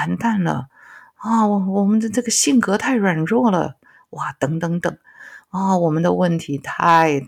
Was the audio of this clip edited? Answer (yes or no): no